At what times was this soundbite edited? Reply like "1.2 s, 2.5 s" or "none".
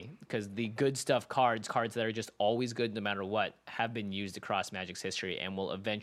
none